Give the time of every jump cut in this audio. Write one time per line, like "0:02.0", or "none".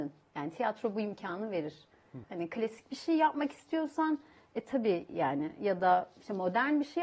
0:02.2